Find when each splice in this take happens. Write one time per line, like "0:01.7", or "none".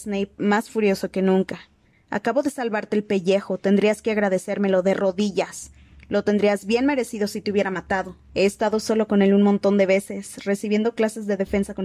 0:01.9
0:08.3